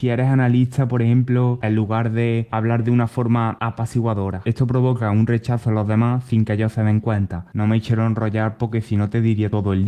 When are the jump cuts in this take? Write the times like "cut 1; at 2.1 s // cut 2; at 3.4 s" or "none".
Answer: cut 1; at 1.6 s